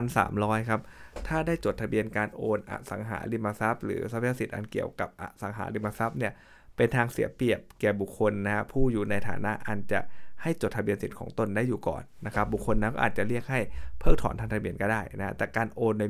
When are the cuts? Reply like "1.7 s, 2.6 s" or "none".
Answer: none